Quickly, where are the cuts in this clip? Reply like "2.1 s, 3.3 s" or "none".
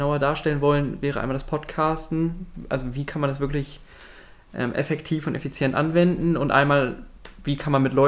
none